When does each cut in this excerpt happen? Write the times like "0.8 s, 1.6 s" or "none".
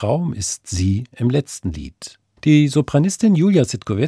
2.4 s